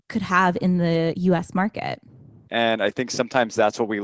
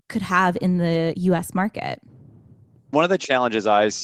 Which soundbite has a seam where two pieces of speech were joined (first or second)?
first